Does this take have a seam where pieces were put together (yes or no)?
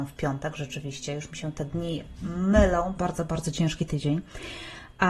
yes